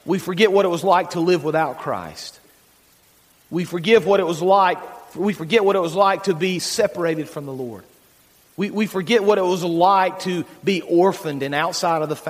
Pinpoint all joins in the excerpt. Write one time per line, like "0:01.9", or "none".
none